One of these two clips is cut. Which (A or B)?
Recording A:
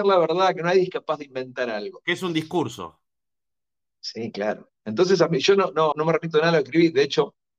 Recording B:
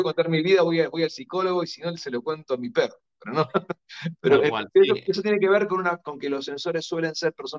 A